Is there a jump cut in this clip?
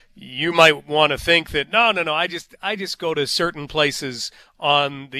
no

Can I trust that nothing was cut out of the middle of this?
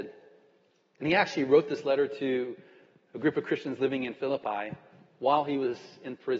yes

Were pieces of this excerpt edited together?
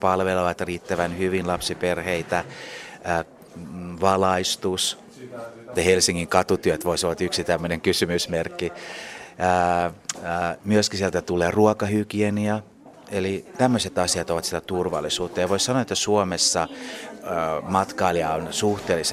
yes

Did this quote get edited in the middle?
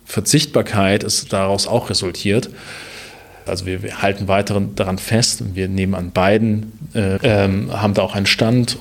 yes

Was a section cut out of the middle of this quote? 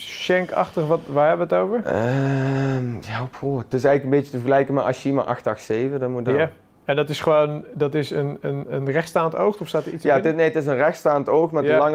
no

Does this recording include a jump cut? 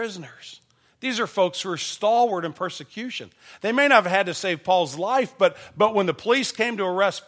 no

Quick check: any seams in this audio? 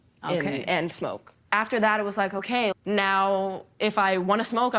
yes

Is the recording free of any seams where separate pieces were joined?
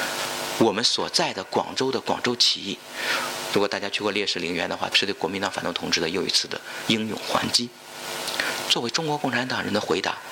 no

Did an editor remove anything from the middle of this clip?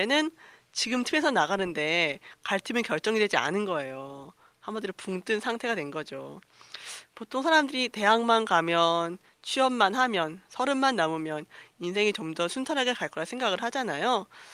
no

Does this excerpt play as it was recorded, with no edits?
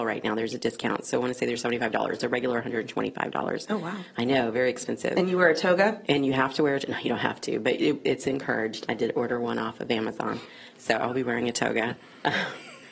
yes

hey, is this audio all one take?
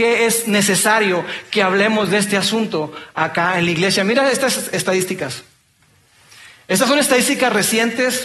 yes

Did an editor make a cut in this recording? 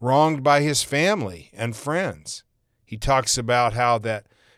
no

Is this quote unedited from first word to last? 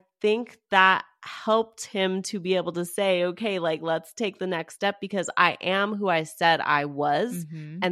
yes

